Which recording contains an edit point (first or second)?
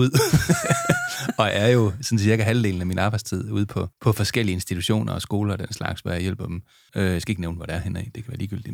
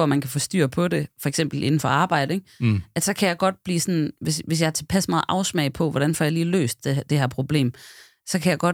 first